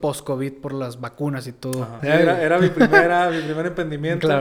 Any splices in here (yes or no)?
yes